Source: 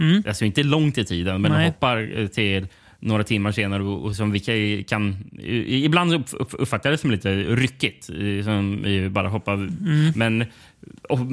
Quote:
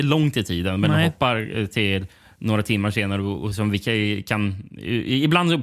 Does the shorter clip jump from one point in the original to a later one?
no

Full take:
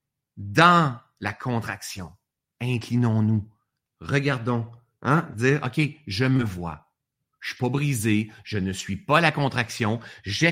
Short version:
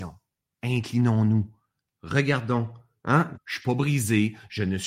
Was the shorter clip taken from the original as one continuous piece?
no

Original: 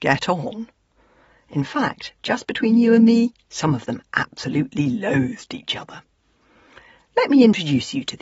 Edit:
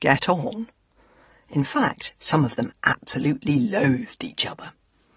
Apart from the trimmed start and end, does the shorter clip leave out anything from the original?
yes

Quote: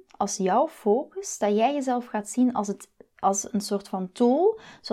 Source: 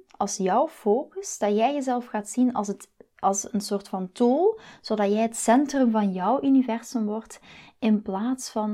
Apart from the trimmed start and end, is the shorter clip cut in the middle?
no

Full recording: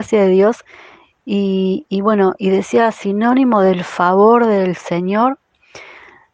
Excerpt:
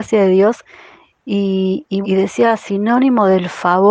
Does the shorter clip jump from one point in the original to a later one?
yes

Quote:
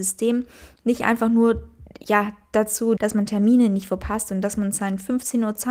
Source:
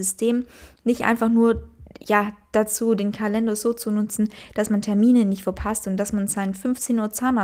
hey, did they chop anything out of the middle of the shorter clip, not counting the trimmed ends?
yes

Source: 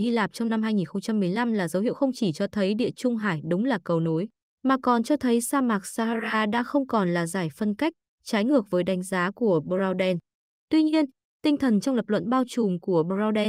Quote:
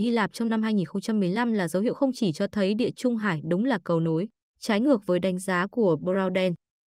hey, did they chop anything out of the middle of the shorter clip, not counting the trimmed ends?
yes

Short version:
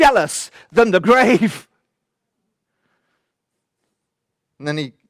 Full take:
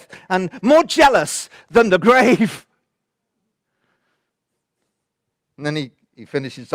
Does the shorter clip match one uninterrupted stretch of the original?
yes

